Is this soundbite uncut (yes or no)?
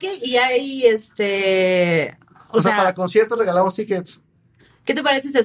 yes